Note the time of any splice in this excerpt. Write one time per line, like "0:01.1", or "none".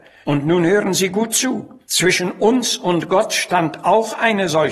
none